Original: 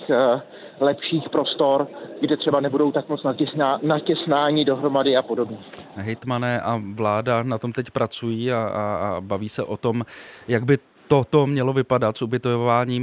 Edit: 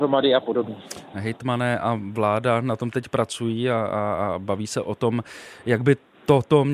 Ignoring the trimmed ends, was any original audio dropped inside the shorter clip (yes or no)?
no